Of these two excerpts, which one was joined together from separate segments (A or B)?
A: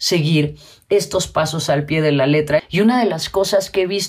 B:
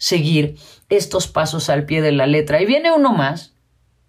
A